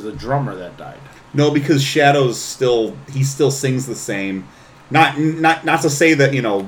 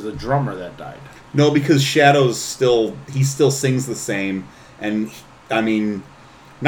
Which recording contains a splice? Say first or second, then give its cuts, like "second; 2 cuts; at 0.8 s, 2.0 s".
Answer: first; 1 cut; at 4.7 s